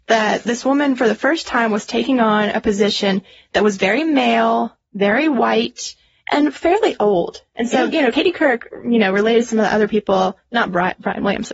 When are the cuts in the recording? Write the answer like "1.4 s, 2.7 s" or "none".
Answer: none

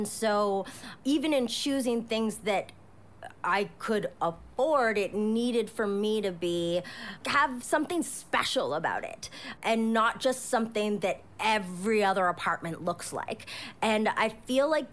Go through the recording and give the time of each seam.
none

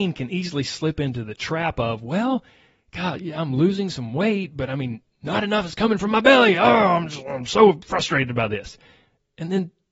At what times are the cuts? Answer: none

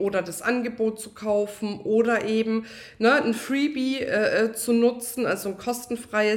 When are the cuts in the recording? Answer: none

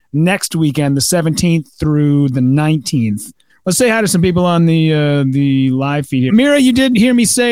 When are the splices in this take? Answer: 3.5 s, 6.3 s

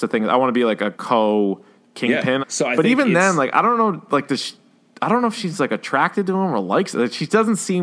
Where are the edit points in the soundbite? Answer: 2.4 s

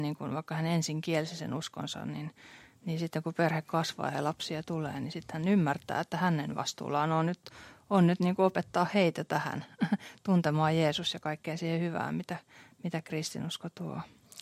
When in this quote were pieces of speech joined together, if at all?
none

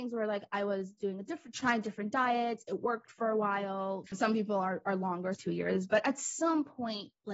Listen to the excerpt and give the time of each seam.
4.1 s, 5.3 s

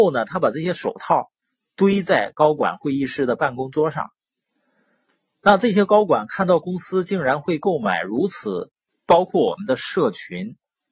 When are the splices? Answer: 8.9 s

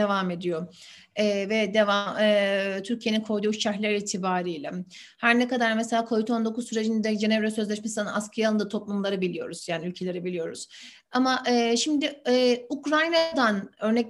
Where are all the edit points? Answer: none

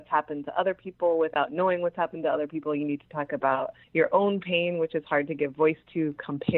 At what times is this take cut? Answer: none

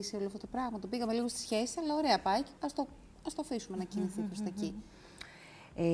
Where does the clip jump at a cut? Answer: 2.6 s

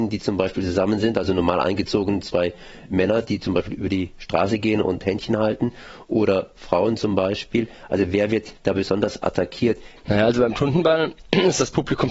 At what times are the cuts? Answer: 10.0 s

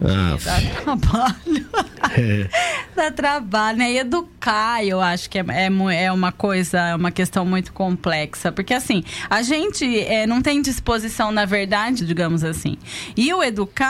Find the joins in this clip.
12.0 s

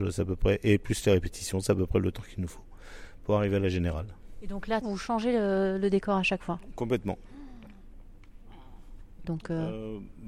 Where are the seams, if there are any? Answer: 4.8 s, 9.2 s

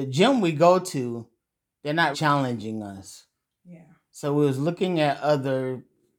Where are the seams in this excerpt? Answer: 2.1 s

